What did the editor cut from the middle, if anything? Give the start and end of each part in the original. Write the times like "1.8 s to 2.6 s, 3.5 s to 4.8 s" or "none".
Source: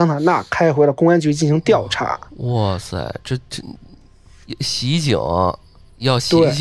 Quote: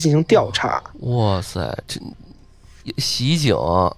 3.2 s to 3.4 s